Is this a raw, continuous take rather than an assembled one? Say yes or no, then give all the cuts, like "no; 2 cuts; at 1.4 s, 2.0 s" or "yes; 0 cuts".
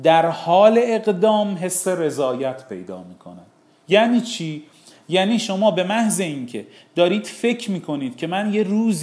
yes; 0 cuts